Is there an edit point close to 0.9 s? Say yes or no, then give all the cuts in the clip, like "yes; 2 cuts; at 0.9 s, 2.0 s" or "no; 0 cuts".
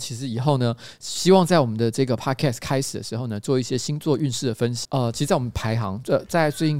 no; 1 cut; at 4.8 s